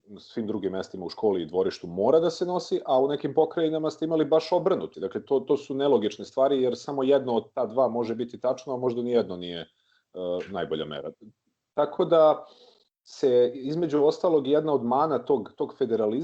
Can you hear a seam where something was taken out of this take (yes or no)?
yes